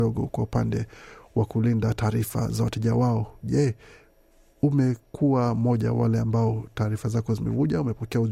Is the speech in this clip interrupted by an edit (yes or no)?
no